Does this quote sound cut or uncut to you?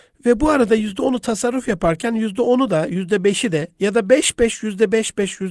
uncut